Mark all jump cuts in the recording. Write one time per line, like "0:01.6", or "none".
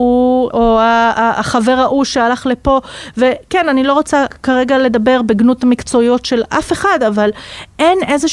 none